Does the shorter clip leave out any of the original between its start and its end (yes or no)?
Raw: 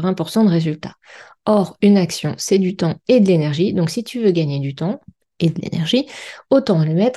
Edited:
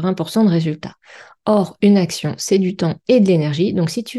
no